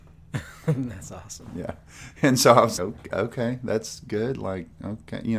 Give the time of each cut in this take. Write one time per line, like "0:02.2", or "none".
0:02.8